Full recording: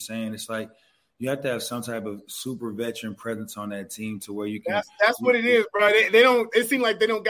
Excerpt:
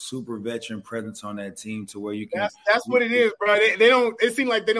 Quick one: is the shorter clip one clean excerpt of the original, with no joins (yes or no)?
yes